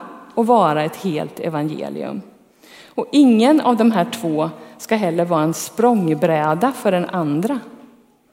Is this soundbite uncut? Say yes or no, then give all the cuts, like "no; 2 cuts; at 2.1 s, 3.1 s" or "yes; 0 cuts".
yes; 0 cuts